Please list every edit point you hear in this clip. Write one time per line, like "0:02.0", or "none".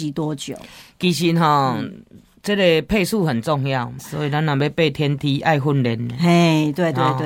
0:04.0